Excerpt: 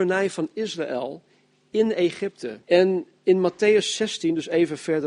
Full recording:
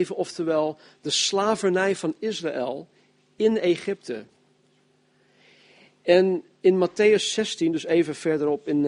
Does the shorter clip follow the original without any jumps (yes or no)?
no